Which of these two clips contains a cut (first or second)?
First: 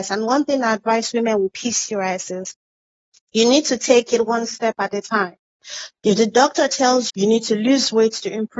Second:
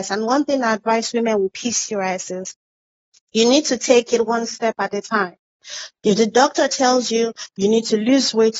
first